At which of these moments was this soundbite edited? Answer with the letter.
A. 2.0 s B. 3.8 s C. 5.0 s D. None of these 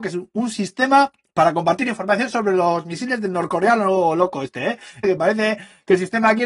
C